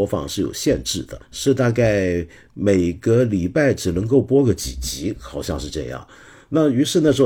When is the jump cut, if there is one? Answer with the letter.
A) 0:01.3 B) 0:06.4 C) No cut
C